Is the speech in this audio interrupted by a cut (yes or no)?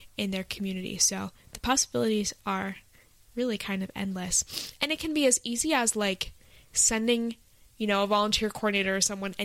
no